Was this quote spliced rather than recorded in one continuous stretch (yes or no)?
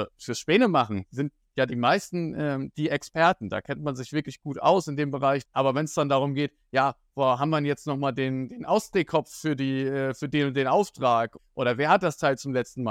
yes